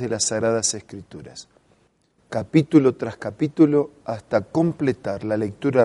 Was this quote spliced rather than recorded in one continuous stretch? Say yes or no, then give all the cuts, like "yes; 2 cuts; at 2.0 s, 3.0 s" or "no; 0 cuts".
no; 0 cuts